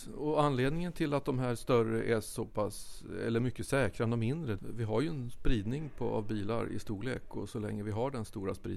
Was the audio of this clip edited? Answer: yes; 1 cut; at 4.6 s

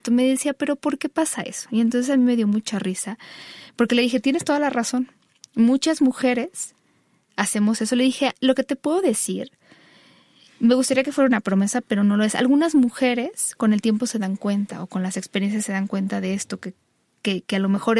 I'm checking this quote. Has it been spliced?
no; 0 cuts

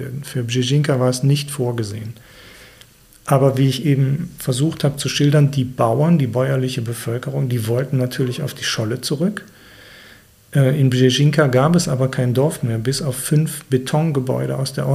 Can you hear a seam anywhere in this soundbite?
no; 0 cuts

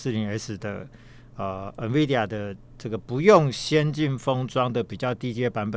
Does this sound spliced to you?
no; 0 cuts

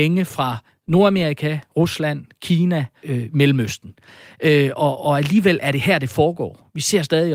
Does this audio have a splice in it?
yes; 1 cut; at 3.0 s

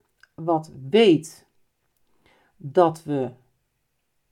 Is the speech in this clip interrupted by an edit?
no; 0 cuts

